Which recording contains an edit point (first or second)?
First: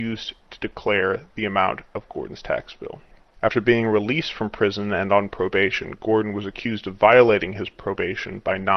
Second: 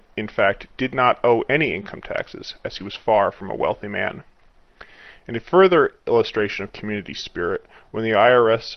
first